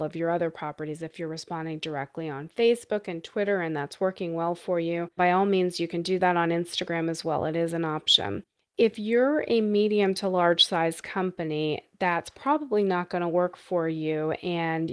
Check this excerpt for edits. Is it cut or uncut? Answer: cut